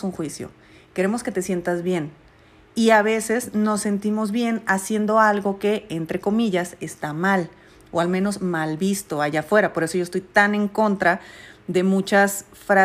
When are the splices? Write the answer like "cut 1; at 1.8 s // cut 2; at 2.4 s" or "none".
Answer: none